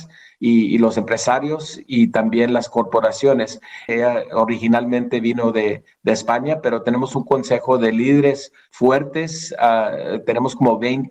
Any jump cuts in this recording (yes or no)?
yes